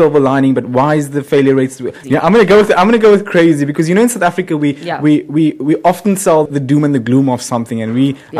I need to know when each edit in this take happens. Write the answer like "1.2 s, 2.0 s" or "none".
2.0 s, 6.5 s